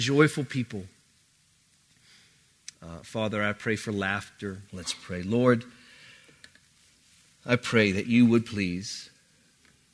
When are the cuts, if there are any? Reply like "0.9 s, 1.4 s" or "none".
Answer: 2.7 s, 4.7 s